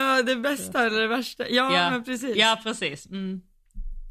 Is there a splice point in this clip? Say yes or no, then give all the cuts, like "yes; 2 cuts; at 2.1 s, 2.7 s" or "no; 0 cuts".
no; 0 cuts